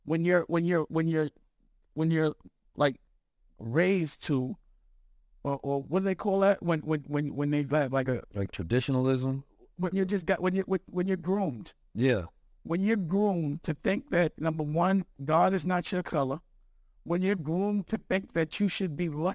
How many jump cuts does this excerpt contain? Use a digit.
1